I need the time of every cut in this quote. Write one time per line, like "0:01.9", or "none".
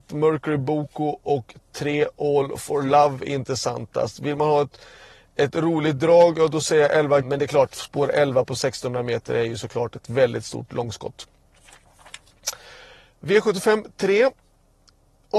0:07.2